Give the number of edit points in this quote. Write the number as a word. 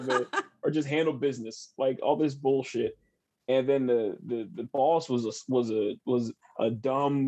zero